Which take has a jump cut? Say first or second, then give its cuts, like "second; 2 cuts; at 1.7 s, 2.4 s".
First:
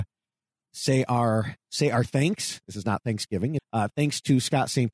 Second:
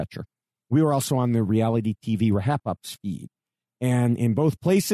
first; 1 cut; at 3.6 s